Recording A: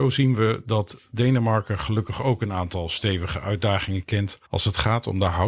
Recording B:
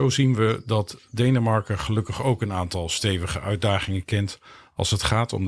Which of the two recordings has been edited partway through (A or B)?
A